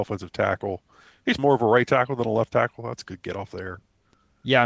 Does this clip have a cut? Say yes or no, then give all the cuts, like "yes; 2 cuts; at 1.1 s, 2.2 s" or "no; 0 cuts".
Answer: yes; 1 cut; at 1.4 s